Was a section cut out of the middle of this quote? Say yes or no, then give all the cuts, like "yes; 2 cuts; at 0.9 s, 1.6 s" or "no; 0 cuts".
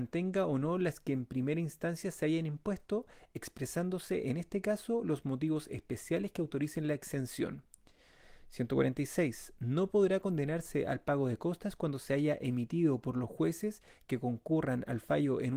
no; 0 cuts